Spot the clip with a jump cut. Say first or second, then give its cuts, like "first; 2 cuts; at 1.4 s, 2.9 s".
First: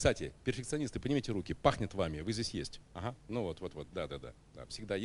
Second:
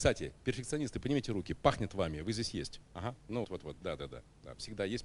second; 1 cut; at 3.4 s